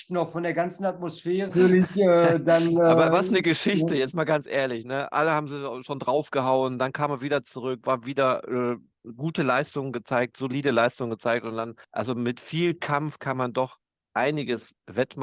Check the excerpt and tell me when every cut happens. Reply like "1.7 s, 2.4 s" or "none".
1.5 s, 11.8 s